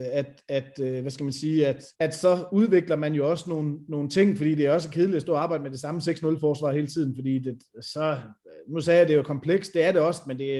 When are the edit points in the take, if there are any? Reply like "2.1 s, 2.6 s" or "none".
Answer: 1.9 s